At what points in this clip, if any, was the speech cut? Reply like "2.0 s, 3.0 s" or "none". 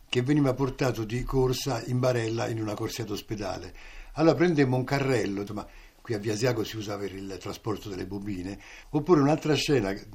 5.5 s, 8.8 s